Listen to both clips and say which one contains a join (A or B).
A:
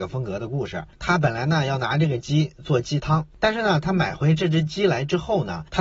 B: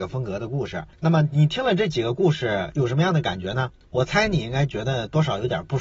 A